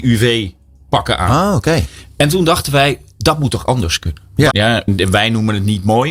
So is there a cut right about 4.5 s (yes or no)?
yes